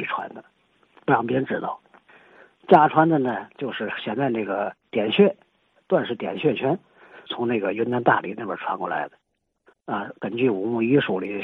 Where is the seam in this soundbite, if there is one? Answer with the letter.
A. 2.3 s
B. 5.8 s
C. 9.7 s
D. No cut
C